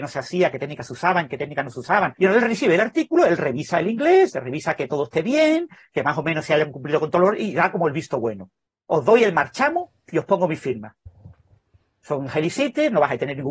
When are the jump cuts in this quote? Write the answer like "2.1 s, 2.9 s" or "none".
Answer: 2.2 s